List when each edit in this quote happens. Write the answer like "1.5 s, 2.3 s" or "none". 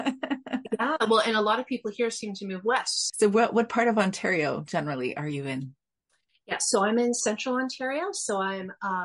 3.1 s